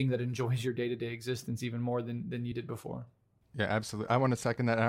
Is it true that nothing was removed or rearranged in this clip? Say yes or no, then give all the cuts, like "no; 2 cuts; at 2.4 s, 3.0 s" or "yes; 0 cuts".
yes; 0 cuts